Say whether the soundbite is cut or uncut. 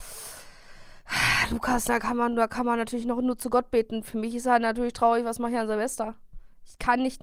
uncut